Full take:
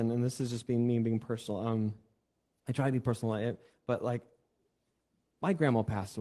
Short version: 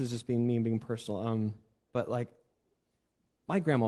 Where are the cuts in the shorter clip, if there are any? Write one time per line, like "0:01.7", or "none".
0:01.8